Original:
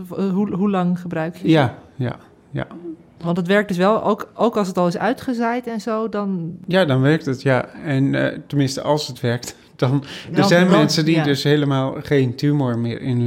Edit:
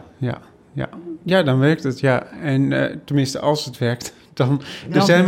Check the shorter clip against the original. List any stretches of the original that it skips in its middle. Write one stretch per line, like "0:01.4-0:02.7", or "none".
0:03.0-0:06.6